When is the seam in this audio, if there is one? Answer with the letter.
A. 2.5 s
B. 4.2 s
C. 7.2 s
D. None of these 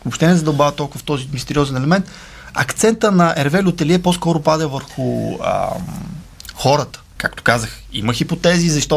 C